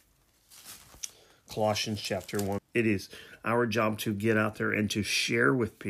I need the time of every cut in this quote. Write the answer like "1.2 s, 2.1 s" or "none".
2.6 s